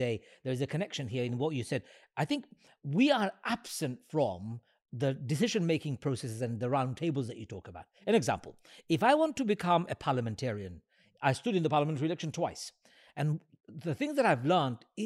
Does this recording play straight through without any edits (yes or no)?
yes